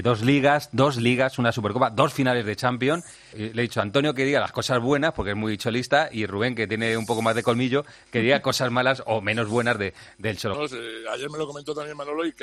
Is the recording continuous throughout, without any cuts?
no; 2 cuts; at 3.3 s, 10.5 s

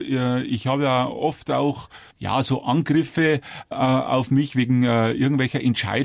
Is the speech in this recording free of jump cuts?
no; 1 cut; at 2.1 s

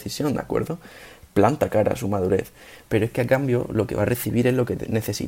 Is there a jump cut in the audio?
yes; 1 cut; at 2.8 s

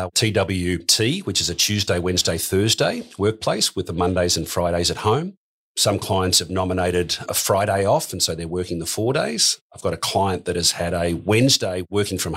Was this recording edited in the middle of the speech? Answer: no; 0 cuts

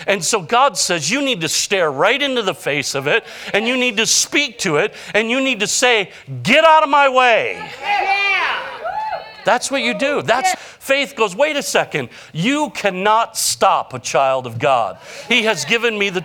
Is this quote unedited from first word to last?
no; 1 cut; at 10.5 s

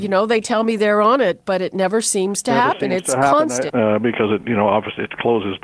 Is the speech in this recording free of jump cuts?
no; 1 cut; at 3.7 s

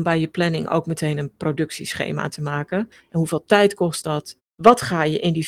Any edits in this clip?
yes; 2 cuts; at 3.0 s, 4.4 s

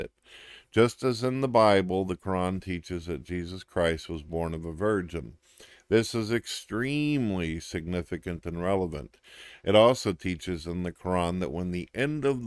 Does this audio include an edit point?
no; 0 cuts

